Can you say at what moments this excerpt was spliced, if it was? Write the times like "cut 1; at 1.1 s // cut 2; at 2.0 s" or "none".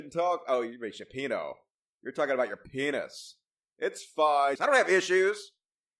cut 1; at 4.6 s